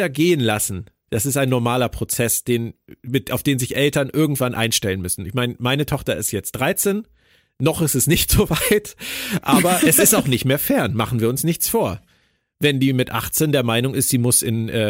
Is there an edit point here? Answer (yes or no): no